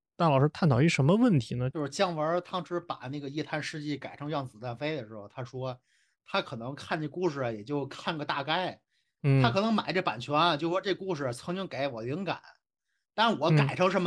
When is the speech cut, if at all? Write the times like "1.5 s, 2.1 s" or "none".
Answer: 1.7 s